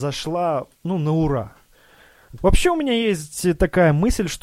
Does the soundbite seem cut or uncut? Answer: cut